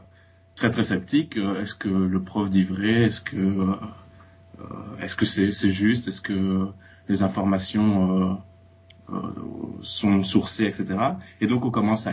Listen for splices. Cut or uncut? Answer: uncut